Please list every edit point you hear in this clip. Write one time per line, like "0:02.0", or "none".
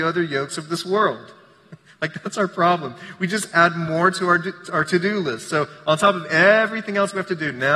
none